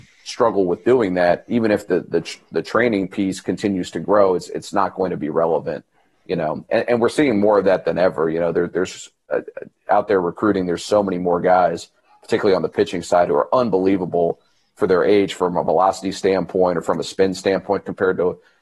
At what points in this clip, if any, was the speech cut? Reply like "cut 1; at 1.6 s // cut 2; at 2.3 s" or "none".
none